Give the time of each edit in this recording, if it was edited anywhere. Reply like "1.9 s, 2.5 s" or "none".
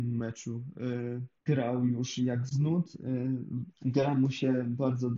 1.5 s, 3.8 s